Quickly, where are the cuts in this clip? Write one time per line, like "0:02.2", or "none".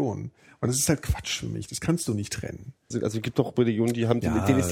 0:02.9